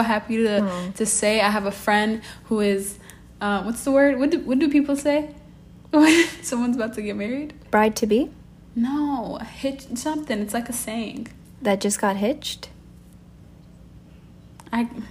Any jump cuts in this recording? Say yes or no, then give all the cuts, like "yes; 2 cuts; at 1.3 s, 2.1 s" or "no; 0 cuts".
no; 0 cuts